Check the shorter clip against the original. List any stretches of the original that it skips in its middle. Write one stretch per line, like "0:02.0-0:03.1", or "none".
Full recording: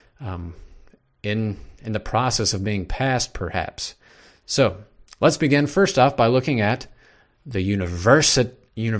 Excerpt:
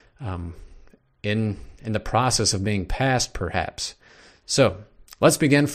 none